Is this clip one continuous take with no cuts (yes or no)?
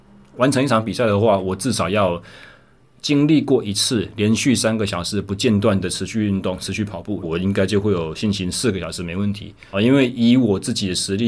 no